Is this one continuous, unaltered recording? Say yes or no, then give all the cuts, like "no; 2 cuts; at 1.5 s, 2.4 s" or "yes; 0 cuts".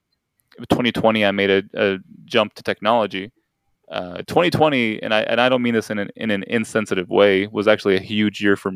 no; 1 cut; at 4.2 s